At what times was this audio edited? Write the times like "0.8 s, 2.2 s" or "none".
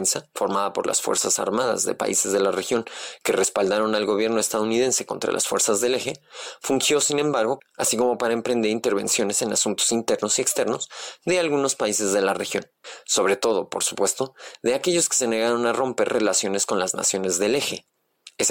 7.6 s

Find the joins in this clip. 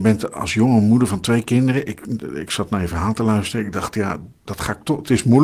none

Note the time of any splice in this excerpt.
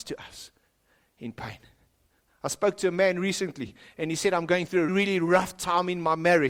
4.9 s

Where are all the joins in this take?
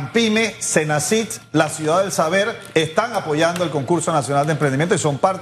none

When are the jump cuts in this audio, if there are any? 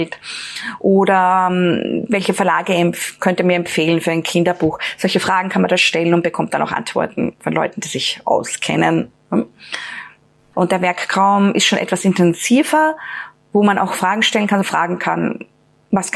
10.5 s, 14.6 s

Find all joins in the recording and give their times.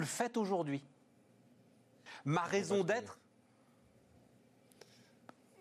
none

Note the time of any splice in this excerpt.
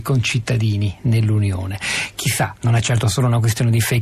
none

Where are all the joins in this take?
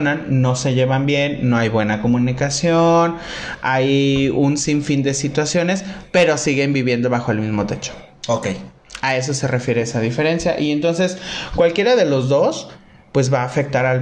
none

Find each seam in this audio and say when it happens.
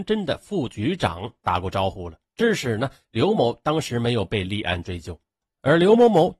2.3 s, 3.3 s

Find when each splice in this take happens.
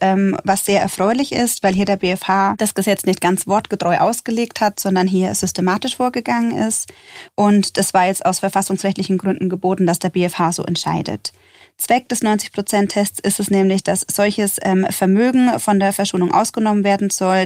7.3 s

